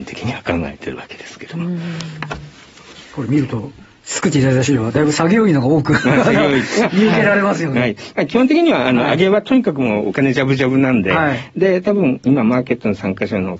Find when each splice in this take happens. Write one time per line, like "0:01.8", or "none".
0:03.0